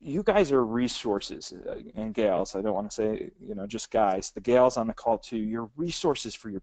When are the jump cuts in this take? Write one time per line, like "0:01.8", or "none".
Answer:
none